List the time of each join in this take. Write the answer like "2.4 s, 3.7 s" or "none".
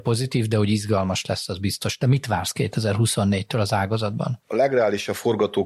none